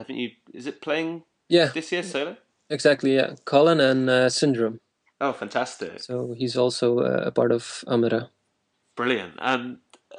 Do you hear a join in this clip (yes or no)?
no